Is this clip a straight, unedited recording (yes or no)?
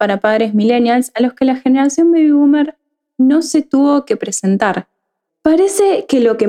no